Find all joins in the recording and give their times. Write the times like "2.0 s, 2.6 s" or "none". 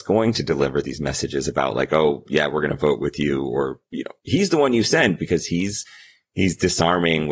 none